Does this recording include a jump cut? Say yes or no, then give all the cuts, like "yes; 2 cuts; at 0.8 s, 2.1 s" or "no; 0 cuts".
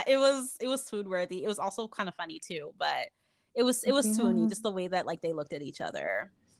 no; 0 cuts